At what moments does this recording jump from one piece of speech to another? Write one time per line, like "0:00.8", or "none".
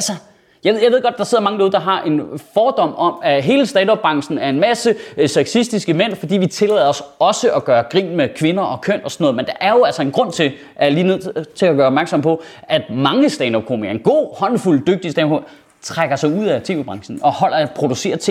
none